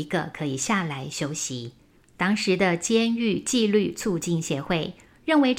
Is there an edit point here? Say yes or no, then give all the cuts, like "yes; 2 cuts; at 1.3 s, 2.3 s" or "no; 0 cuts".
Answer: yes; 1 cut; at 2.0 s